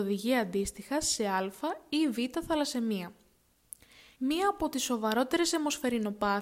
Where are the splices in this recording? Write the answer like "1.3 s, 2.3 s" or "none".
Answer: 4.2 s